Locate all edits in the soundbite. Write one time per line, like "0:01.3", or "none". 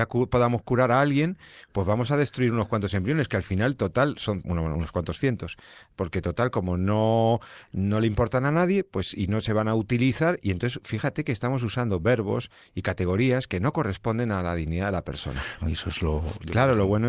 0:15.6